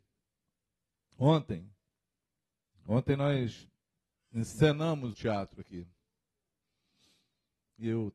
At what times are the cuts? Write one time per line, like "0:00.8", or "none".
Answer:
0:05.1

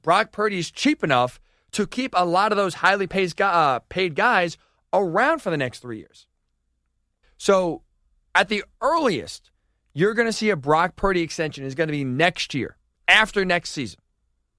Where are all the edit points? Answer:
0:07.2

